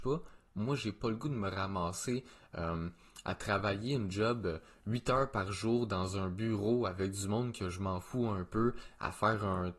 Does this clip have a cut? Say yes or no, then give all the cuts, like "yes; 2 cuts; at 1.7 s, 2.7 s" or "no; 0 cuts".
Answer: no; 0 cuts